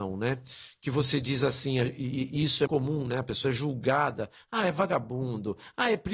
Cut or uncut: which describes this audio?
cut